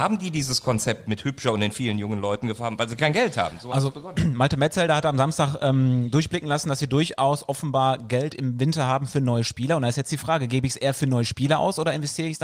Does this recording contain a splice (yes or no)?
no